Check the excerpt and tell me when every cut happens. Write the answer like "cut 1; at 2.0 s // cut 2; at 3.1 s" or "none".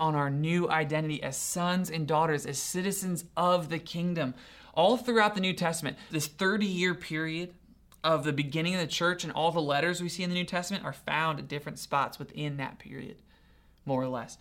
cut 1; at 6.1 s